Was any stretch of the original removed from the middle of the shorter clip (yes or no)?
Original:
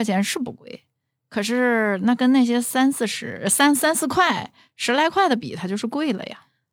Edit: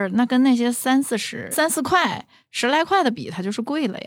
yes